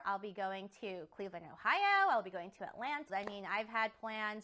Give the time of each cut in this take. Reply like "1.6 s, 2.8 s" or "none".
3.1 s